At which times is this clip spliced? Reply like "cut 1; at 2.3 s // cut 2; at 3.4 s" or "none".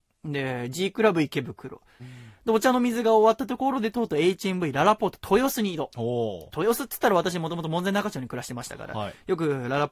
cut 1; at 2.0 s